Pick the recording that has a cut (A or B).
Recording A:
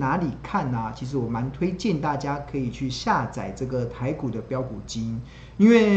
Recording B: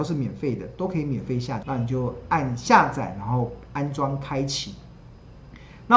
B